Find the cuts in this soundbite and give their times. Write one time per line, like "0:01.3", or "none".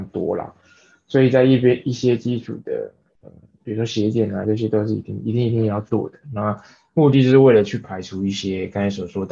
0:04.4